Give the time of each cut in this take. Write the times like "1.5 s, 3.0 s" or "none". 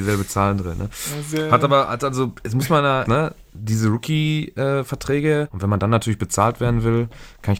3.1 s, 5.5 s